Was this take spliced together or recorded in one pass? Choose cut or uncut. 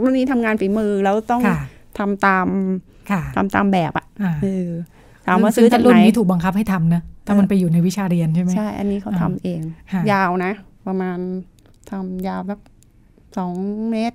uncut